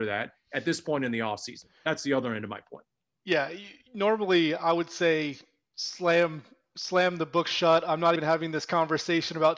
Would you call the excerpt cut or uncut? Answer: cut